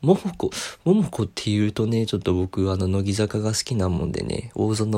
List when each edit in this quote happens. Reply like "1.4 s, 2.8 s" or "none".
none